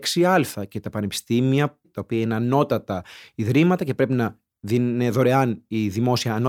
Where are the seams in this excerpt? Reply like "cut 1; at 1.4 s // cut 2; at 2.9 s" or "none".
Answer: cut 1; at 1.8 s